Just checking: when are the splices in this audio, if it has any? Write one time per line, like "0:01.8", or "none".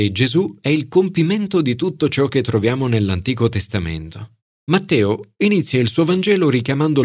0:04.6

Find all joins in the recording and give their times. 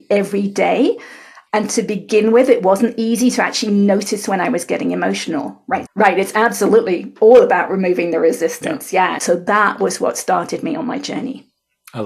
0:05.8
0:09.2

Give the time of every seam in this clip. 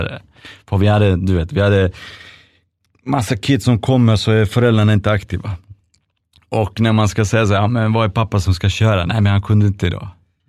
none

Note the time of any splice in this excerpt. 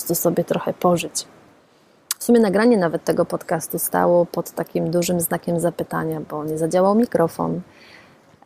none

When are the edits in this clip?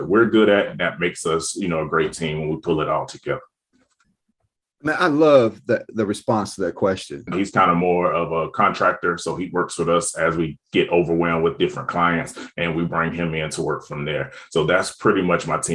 0:07.3

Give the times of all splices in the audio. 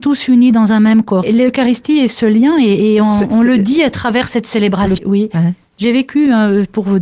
0:01.2
0:05.0

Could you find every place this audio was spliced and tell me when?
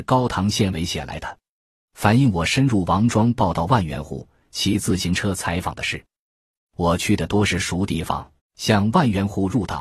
0:06.6
0:08.4

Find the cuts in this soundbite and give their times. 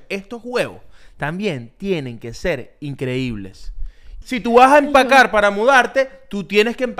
0:04.2

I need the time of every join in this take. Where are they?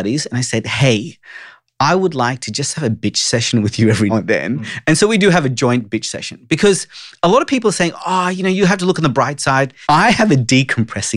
0:04.1
0:09.8

